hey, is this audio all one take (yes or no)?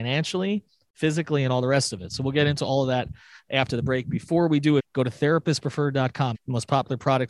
no